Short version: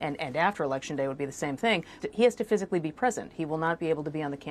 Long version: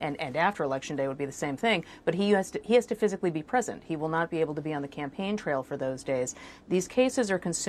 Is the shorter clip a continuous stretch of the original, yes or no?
no